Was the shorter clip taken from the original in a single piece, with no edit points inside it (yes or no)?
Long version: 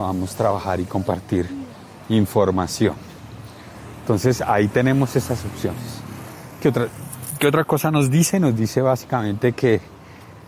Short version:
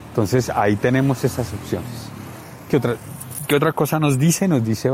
yes